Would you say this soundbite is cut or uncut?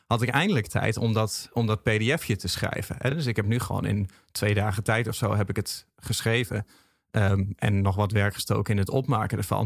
uncut